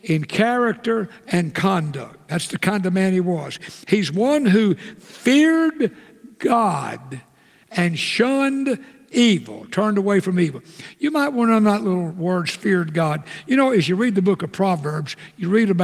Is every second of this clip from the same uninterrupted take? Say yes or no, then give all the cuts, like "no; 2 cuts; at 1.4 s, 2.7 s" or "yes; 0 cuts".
yes; 0 cuts